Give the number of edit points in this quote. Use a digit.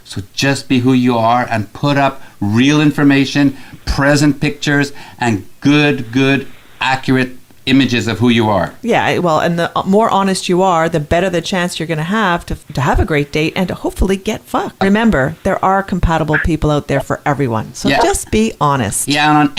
0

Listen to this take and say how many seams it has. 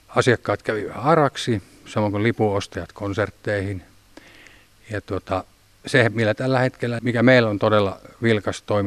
1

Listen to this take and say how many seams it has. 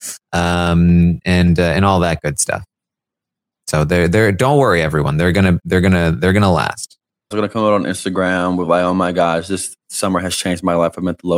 1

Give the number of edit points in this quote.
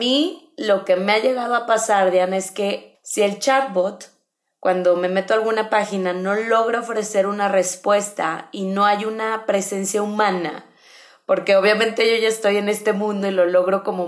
1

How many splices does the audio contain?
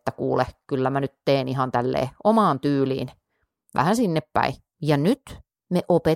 1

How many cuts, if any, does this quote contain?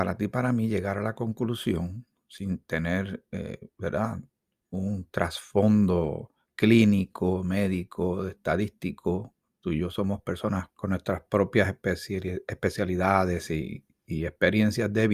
2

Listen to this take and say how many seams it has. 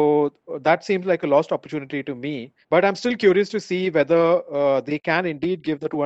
1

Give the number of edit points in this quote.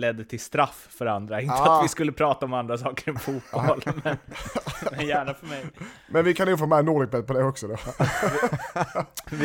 0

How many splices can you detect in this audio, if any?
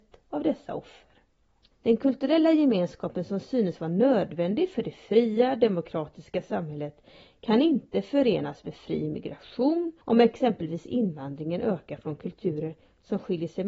2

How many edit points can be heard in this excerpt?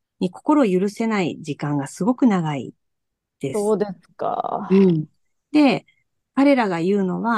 0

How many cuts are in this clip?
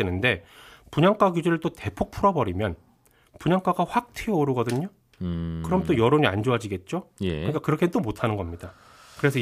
0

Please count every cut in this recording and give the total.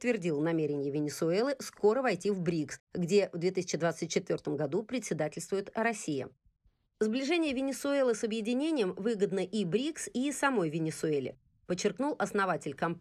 0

